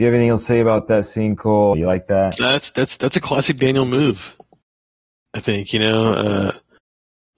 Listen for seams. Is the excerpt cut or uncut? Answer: cut